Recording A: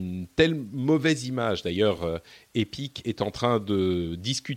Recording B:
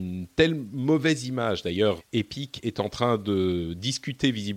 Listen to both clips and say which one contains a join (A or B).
B